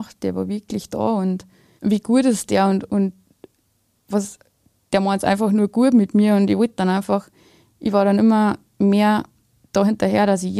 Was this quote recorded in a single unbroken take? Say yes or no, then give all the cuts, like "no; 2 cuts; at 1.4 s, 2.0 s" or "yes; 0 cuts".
no; 1 cut; at 1.8 s